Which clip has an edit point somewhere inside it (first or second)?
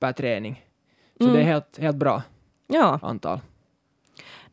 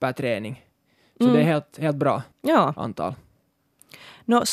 second